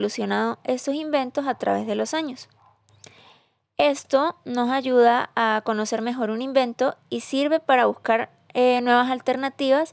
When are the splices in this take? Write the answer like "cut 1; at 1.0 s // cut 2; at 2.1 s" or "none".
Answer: none